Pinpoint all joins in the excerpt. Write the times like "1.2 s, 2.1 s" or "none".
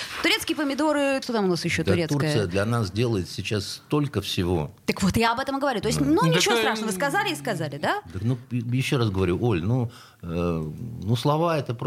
1.2 s